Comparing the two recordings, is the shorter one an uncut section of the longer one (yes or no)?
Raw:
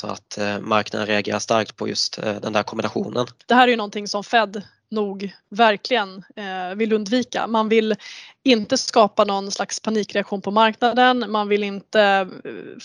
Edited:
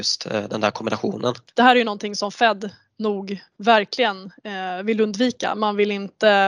no